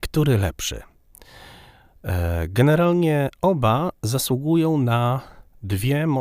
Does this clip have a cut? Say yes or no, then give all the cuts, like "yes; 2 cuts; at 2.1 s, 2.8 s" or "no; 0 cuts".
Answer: no; 0 cuts